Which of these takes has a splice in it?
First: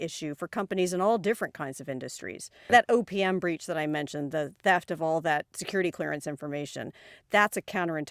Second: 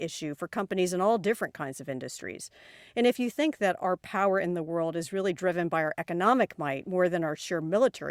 first; 1 cut; at 2.7 s

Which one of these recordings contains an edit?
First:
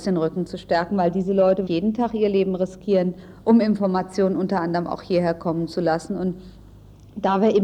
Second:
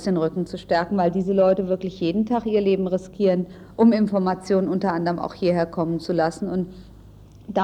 first; 1 cut; at 1.7 s

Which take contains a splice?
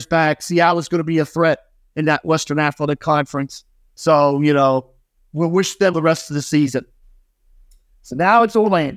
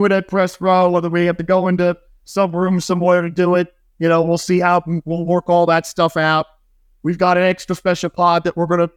first; 1 cut; at 5.9 s

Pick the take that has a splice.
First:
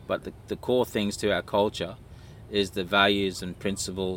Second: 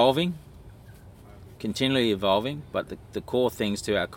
second; 1 cut; at 1.6 s

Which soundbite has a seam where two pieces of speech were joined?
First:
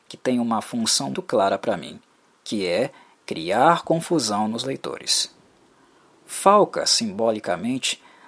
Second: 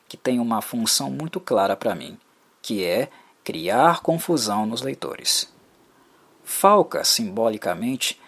first; 1 cut; at 1.1 s

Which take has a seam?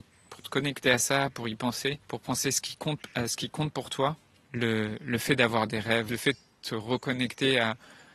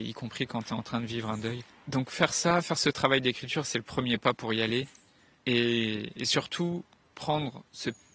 first; 3 cuts; at 2.0 s, 4.4 s, 6.1 s

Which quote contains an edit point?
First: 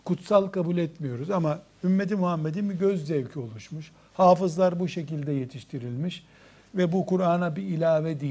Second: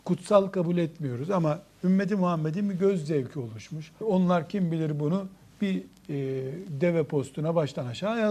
second; 1 cut; at 4.0 s

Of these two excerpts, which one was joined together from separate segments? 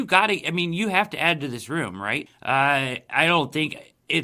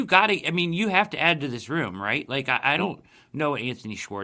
first; 1 cut; at 2.3 s

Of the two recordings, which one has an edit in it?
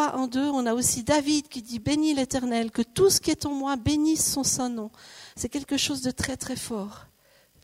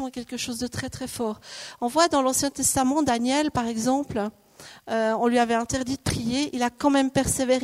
first; 1 cut; at 5.3 s

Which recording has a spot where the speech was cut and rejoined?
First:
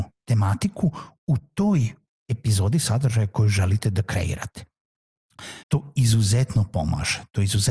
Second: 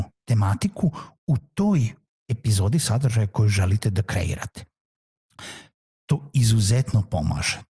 first; 1 cut; at 5.6 s

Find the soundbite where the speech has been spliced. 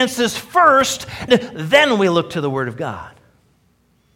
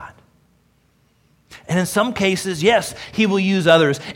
first; 1 cut; at 1.3 s

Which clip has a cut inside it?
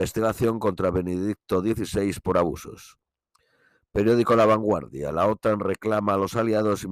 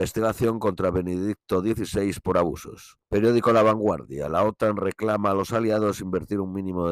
second; 1 cut; at 3.0 s

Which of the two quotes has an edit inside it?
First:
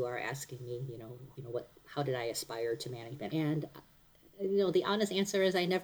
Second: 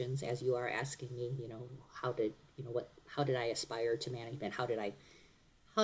first; 2 cuts; at 1.3 s, 3.3 s

